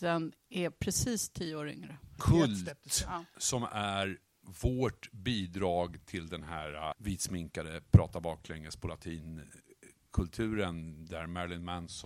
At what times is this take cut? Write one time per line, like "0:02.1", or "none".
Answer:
0:02.2
0:06.9